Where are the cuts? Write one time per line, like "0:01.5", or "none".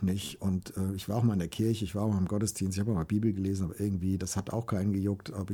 none